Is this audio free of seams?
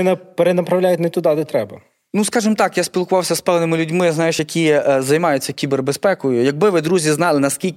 yes; 0 cuts

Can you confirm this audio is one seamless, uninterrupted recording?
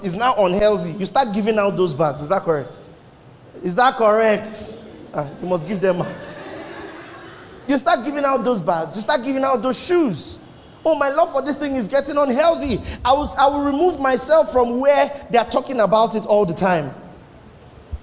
yes; 0 cuts

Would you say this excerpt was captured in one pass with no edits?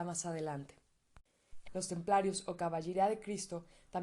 no; 1 cut; at 1.7 s

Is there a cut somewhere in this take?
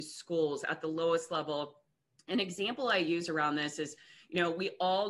no; 0 cuts

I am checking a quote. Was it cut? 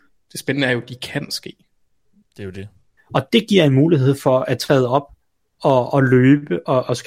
yes; 1 cut; at 3.0 s

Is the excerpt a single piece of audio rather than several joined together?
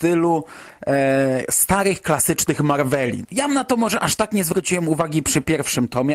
no; 1 cut; at 3.2 s

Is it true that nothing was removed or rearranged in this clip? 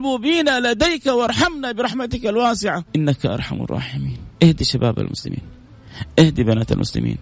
no; 2 cuts; at 2.9 s, 4.3 s

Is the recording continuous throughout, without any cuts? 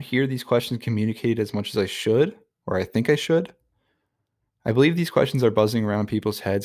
yes; 0 cuts

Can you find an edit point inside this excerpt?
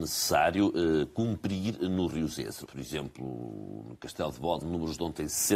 yes; 2 cuts; at 2.7 s, 4.6 s

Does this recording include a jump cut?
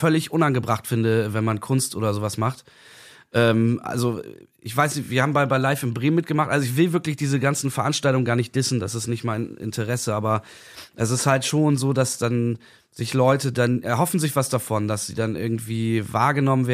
no; 0 cuts

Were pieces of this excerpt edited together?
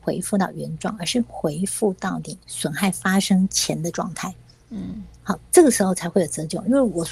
no; 0 cuts

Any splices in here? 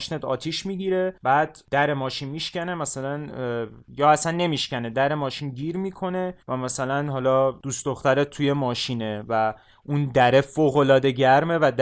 yes; 1 cut; at 6.4 s

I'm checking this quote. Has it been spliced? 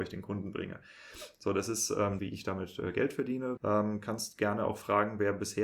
yes; 2 cuts; at 2.2 s, 3.6 s

